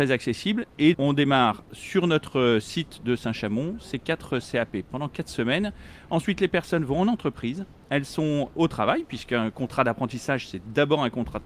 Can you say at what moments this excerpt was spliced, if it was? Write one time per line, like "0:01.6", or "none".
0:00.9
0:08.5